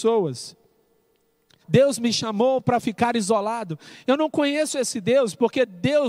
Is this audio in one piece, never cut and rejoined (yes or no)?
no